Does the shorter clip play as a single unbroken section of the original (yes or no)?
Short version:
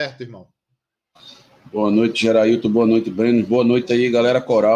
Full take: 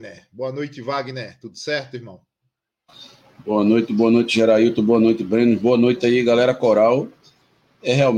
no